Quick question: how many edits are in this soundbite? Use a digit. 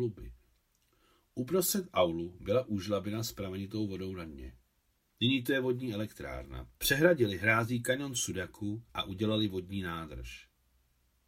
3